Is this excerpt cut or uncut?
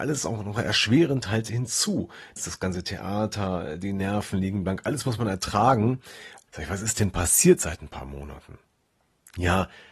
cut